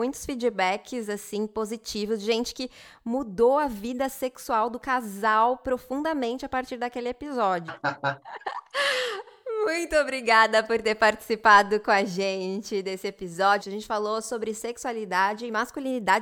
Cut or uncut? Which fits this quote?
cut